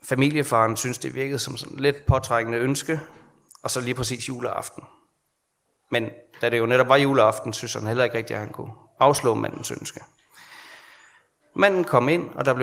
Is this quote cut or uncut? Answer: uncut